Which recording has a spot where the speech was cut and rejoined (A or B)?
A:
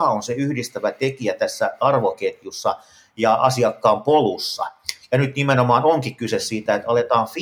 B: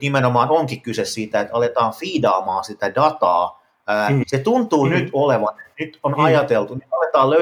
B